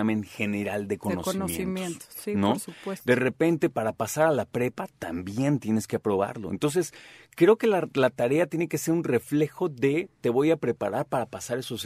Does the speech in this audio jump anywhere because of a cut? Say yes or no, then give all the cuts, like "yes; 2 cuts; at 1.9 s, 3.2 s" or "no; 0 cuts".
no; 0 cuts